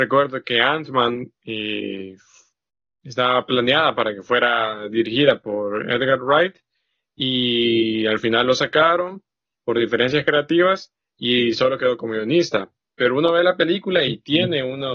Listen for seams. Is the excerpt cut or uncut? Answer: uncut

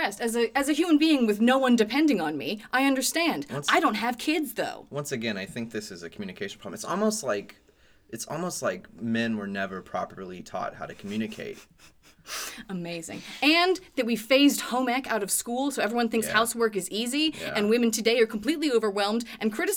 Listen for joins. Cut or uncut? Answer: uncut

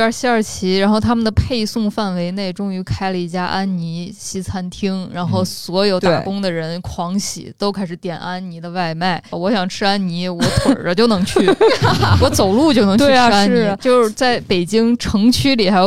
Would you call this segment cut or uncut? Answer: cut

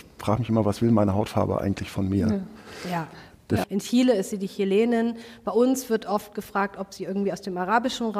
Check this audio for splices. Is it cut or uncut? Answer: cut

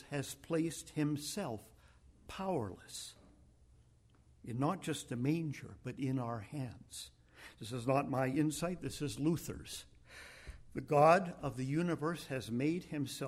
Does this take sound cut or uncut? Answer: uncut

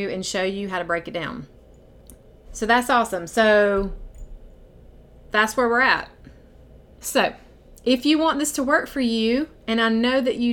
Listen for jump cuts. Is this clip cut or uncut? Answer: cut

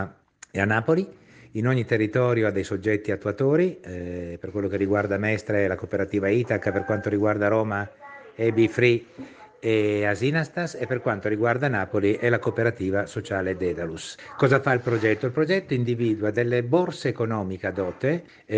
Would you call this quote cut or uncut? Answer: uncut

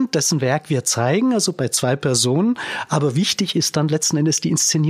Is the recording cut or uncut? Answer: uncut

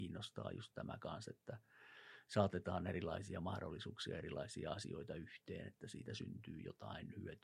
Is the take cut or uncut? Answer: uncut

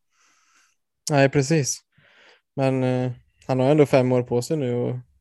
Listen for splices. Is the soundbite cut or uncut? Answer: uncut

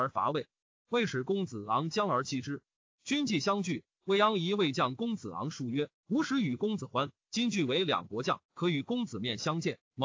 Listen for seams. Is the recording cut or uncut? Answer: cut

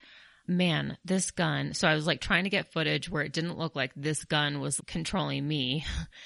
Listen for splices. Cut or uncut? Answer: cut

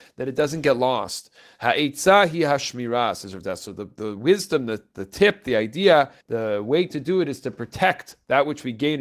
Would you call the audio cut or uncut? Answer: cut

